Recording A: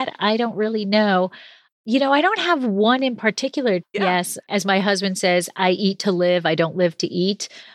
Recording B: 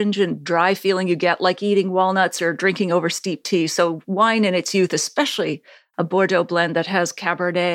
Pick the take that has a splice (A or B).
A